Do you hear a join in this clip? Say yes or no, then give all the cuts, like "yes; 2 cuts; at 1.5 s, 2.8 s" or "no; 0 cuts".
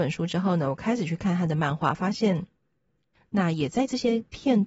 yes; 1 cut; at 3.1 s